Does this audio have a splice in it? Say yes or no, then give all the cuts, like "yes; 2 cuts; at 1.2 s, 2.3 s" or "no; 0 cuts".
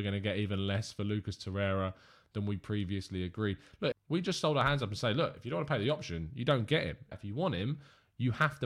yes; 2 cuts; at 3.9 s, 7.1 s